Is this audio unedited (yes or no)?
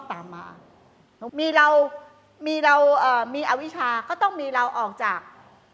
no